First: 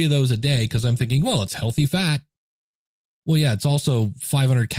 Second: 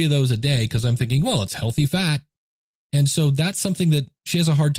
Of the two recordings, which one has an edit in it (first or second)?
second